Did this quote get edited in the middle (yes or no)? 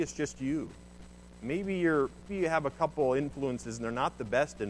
yes